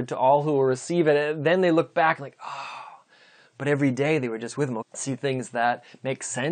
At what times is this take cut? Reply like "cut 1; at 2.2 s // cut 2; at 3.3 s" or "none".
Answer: cut 1; at 4.8 s